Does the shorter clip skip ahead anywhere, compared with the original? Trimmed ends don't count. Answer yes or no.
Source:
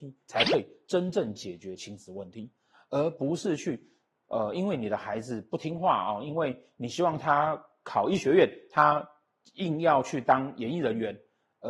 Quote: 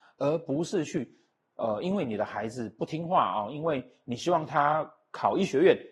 no